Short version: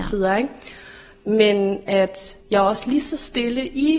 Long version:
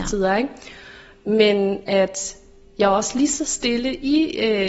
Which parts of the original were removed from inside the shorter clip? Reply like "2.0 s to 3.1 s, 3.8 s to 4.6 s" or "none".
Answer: 2.4 s to 2.7 s